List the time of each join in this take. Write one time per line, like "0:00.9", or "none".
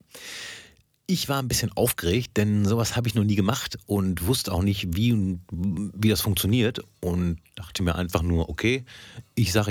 none